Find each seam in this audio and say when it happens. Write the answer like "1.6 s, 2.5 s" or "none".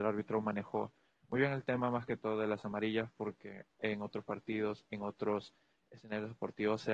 none